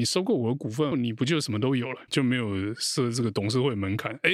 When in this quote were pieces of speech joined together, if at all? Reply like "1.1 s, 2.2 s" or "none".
0.9 s, 2.1 s